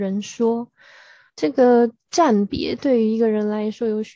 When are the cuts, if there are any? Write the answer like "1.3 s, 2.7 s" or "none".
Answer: 1.3 s